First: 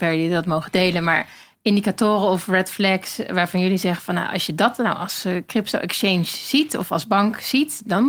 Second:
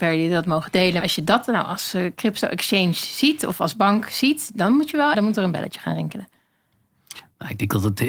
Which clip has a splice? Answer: second; 2 cuts; at 1.0 s, 5.1 s

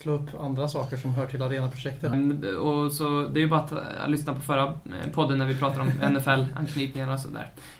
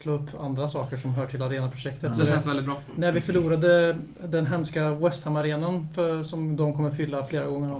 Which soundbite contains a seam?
first; 1 cut; at 2.1 s

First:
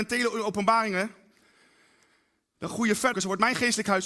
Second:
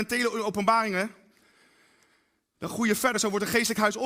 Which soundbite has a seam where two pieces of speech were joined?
first; 1 cut; at 3.1 s

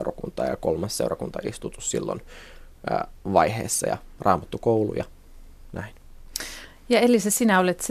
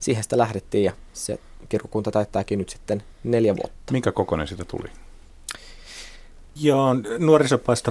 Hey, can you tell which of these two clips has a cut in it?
second; 1 cut; at 6.6 s

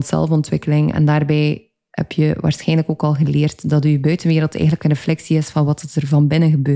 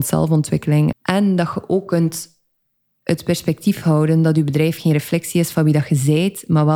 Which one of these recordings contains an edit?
second; 1 cut; at 0.9 s

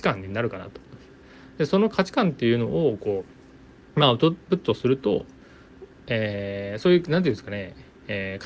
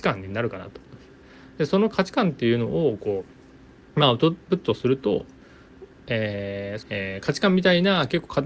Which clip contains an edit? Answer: second; 1 cut; at 6.8 s

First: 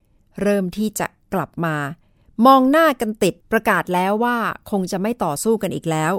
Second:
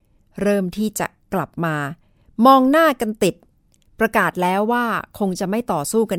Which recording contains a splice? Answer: first; 1 cut; at 3.4 s

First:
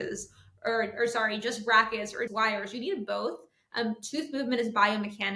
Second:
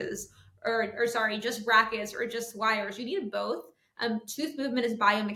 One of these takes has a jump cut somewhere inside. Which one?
first; 1 cut; at 2.3 s

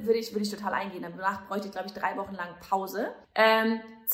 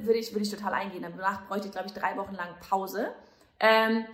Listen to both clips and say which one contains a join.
first; 1 cut; at 3.2 s

